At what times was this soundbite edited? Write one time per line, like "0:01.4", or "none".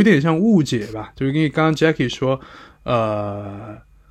none